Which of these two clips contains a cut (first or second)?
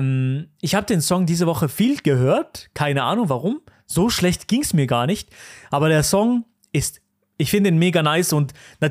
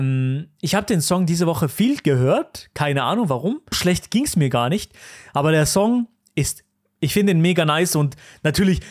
second